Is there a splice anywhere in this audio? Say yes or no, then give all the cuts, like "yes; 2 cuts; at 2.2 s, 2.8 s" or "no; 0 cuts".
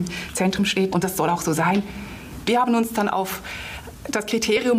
yes; 2 cuts; at 0.9 s, 2.5 s